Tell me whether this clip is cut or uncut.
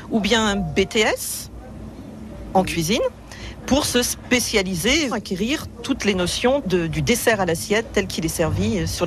cut